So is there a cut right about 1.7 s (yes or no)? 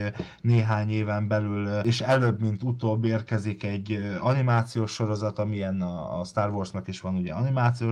no